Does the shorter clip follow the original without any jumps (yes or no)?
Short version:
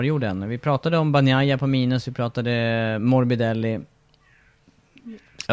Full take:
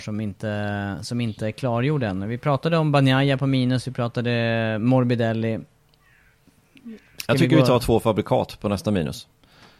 yes